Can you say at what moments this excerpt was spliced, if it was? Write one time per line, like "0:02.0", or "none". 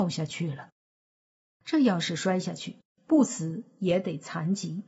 0:01.6